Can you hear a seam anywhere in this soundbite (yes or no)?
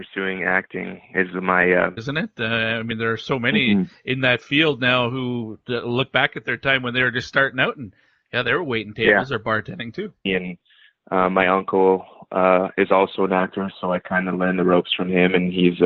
yes